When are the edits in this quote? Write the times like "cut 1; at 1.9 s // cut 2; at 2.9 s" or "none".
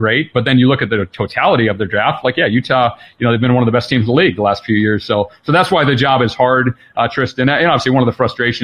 none

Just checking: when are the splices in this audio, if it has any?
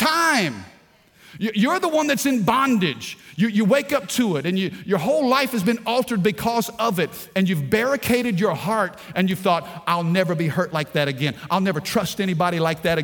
none

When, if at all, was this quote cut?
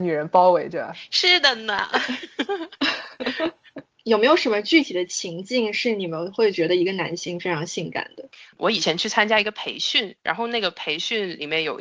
none

